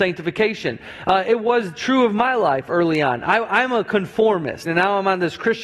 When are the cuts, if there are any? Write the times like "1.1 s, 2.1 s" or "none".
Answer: 4.7 s